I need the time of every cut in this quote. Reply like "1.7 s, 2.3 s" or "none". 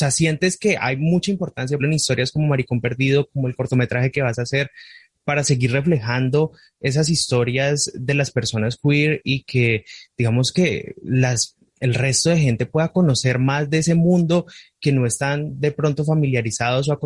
1.8 s